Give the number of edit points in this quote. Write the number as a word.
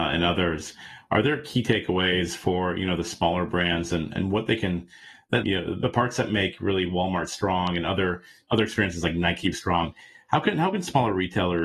two